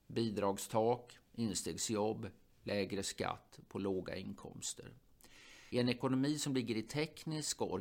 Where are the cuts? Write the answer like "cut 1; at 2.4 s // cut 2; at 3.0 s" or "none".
cut 1; at 5.7 s